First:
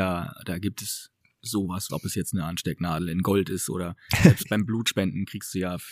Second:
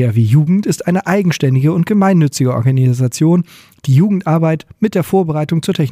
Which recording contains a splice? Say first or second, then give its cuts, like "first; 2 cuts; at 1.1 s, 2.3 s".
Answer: first; 1 cut; at 1.9 s